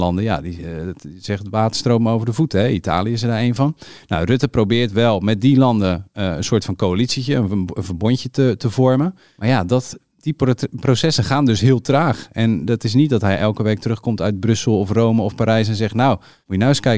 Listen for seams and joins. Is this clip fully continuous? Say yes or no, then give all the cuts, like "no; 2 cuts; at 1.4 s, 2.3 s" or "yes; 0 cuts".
yes; 0 cuts